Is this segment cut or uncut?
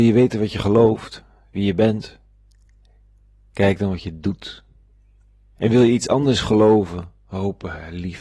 cut